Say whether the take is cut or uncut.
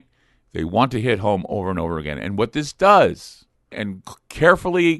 cut